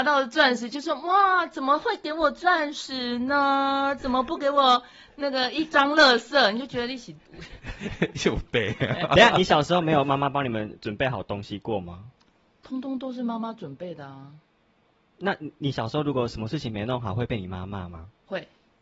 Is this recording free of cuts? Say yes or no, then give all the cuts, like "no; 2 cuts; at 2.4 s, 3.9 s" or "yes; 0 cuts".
yes; 0 cuts